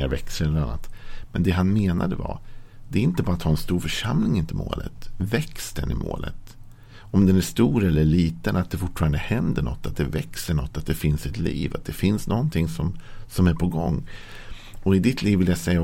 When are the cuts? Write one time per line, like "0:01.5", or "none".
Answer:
none